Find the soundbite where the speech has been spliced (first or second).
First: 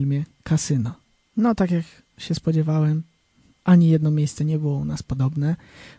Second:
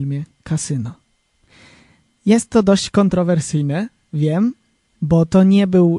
first